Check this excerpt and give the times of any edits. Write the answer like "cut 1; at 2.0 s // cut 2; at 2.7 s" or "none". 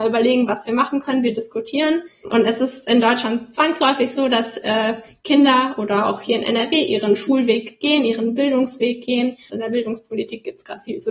cut 1; at 2.2 s // cut 2; at 9.5 s